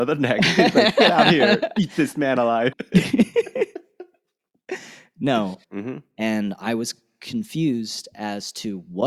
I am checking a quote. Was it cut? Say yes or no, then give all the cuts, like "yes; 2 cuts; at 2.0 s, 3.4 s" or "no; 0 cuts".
yes; 2 cuts; at 2.7 s, 5.6 s